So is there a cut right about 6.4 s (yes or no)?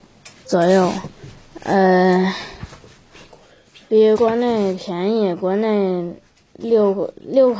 no